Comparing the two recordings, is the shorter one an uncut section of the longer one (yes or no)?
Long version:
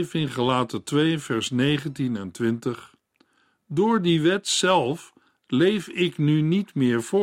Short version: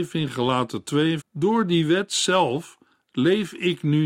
no